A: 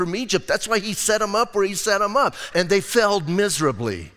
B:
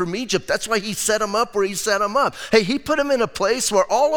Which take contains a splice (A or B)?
A